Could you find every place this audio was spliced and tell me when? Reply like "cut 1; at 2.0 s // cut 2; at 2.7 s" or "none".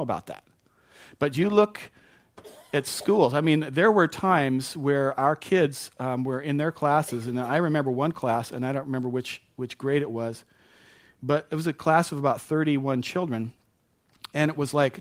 none